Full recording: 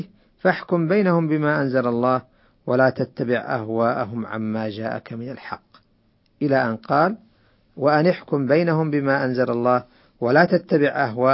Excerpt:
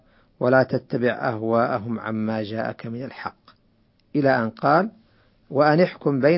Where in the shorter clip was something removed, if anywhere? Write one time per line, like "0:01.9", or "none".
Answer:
none